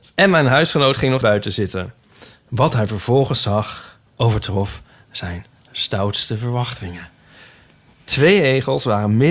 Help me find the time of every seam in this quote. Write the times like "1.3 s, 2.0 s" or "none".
1.2 s, 4.1 s

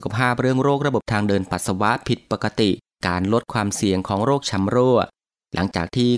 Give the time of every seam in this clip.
none

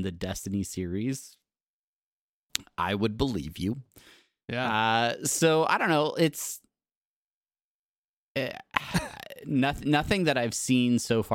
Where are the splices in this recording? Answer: none

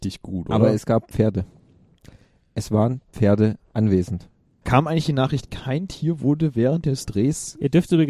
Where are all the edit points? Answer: 4.6 s

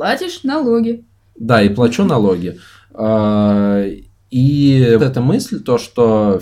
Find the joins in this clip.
5.0 s

